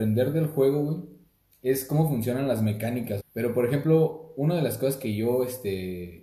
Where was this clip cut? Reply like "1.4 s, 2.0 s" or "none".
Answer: 3.2 s